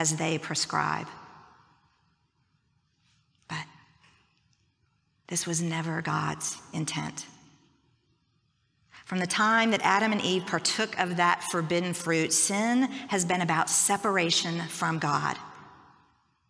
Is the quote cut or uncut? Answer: uncut